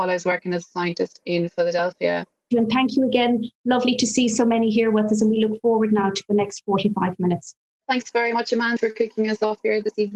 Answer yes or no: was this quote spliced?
yes